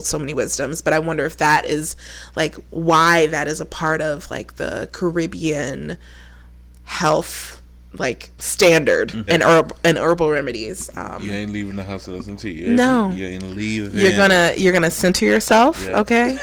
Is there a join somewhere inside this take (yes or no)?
yes